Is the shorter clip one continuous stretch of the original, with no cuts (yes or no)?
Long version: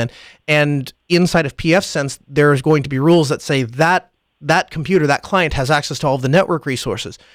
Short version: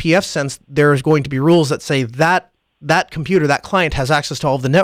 yes